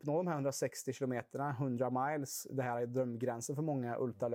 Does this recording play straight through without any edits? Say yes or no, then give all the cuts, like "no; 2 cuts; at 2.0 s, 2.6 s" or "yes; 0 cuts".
yes; 0 cuts